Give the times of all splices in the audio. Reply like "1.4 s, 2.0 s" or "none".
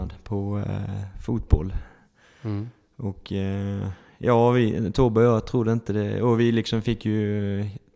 none